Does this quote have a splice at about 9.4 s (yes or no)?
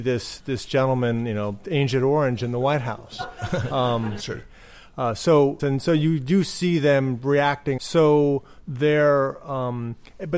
no